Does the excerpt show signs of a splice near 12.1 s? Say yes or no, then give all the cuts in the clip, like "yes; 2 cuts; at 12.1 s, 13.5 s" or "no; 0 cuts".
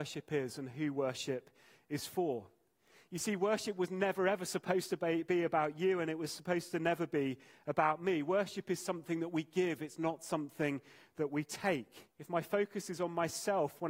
yes; 1 cut; at 12.1 s